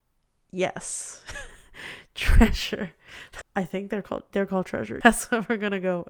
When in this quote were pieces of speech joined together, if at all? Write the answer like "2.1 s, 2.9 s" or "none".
3.4 s, 5.0 s